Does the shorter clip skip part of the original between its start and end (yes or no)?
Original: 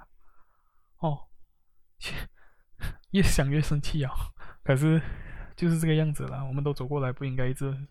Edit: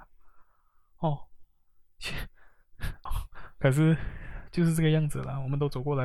yes